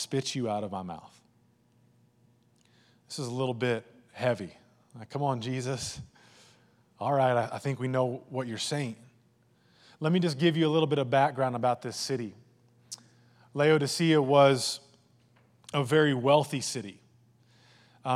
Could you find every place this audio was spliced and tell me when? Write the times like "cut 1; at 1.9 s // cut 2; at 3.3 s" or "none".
none